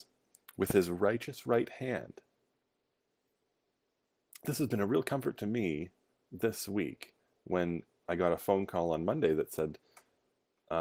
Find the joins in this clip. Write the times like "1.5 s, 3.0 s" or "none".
none

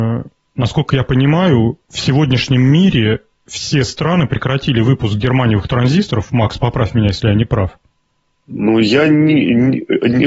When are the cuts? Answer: none

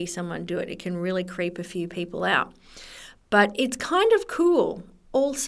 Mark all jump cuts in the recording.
none

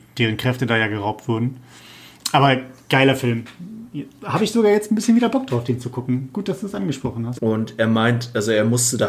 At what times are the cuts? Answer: 7.4 s

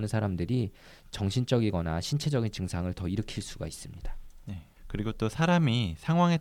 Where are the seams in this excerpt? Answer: 4.8 s

